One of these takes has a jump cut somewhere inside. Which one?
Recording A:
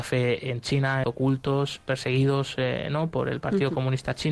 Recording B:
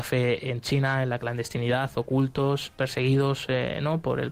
A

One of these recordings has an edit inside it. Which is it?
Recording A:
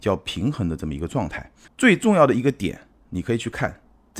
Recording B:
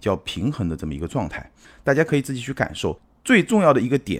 A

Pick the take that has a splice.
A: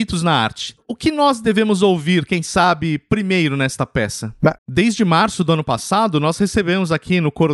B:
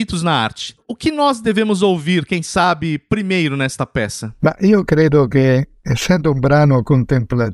A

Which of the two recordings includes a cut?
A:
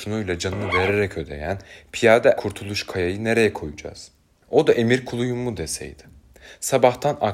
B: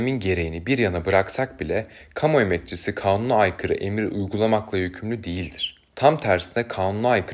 A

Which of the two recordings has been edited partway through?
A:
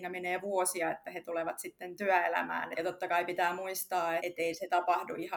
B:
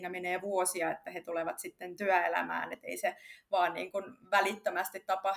A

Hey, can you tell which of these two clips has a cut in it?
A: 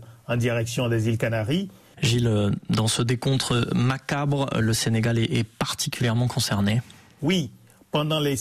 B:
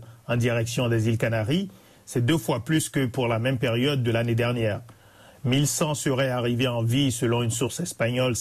A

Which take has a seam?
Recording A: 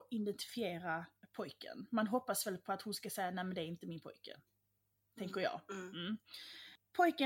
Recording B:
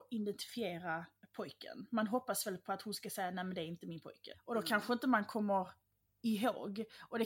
B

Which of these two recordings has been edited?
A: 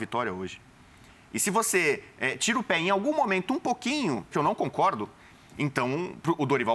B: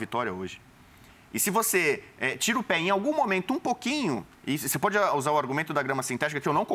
A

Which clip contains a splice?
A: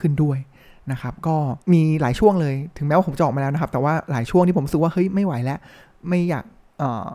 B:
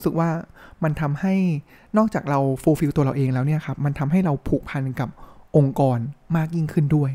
A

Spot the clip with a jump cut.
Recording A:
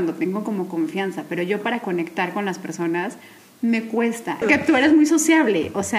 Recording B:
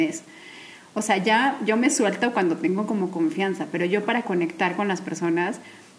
A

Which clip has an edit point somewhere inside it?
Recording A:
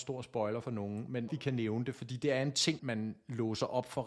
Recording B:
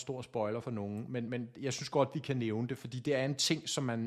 A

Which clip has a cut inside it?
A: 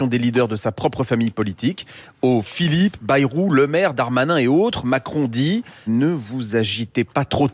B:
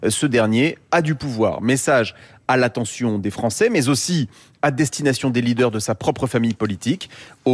A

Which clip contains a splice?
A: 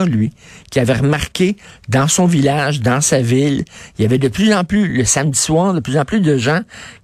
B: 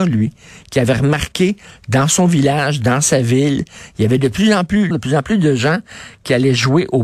B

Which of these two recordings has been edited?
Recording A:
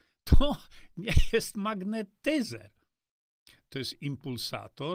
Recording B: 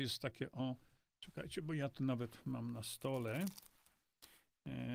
A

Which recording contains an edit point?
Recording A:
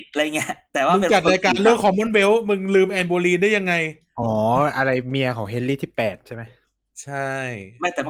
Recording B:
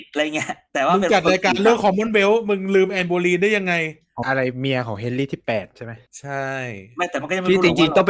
B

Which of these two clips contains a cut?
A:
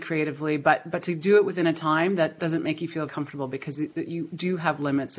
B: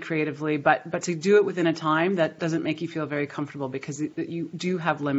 A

